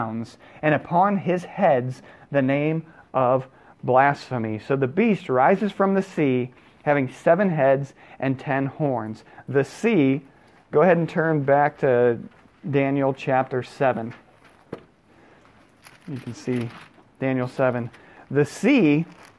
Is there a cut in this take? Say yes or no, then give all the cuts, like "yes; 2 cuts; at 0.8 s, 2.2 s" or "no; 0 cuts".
no; 0 cuts